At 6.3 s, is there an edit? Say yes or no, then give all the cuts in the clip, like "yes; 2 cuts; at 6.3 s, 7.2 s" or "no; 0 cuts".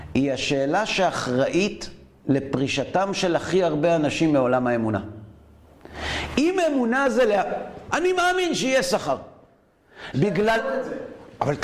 no; 2 cuts; at 7.9 s, 10.1 s